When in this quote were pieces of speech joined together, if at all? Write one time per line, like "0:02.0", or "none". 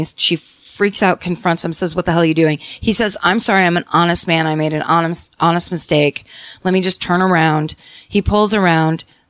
none